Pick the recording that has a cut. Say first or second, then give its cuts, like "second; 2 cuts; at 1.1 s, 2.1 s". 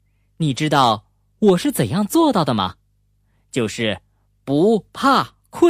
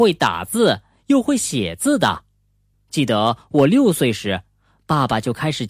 second; 1 cut; at 2.7 s